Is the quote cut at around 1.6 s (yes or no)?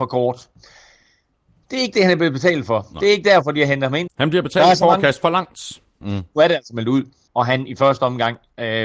no